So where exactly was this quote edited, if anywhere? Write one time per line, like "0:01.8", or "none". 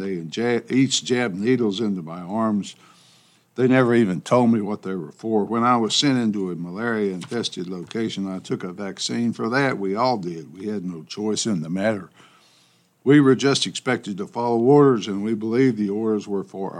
none